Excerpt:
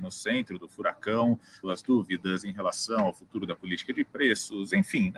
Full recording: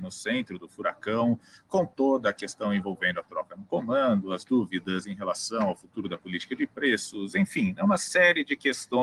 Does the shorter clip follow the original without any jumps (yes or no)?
no